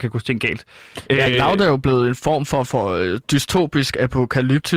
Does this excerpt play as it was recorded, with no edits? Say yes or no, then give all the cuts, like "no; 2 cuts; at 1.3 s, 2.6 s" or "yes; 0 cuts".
yes; 0 cuts